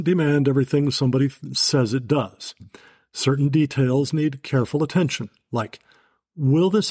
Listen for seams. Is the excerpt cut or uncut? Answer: uncut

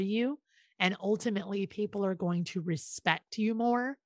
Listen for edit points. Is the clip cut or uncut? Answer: uncut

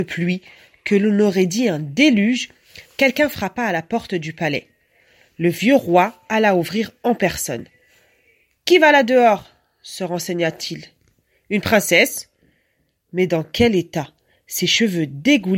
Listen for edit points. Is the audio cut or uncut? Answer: uncut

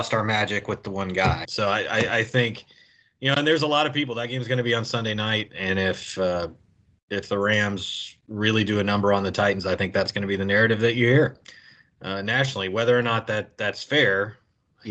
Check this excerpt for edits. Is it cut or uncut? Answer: cut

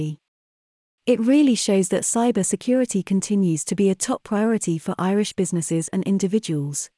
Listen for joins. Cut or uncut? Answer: uncut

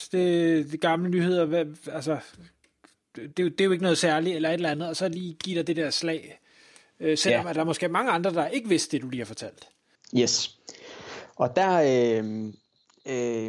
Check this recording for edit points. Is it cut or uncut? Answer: uncut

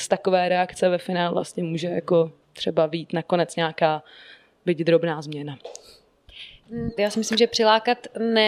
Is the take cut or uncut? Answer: cut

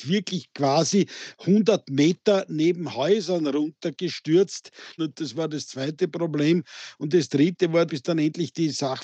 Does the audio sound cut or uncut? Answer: cut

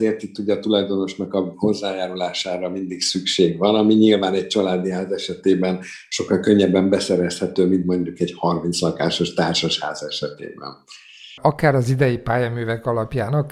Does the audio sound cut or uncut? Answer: uncut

